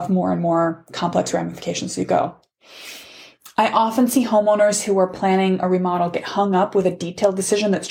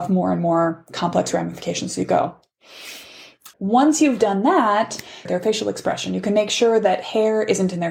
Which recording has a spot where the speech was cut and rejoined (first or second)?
second